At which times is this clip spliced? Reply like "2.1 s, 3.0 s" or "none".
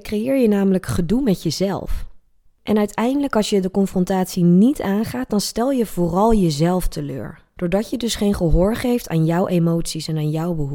2.5 s